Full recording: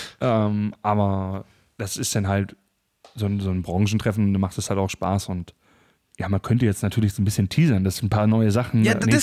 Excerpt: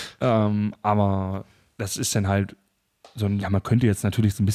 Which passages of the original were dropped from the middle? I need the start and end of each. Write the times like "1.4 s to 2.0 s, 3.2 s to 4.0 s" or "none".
3.4 s to 6.2 s